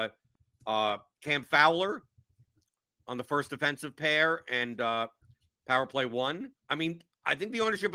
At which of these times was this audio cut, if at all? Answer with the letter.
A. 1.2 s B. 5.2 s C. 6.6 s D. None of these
C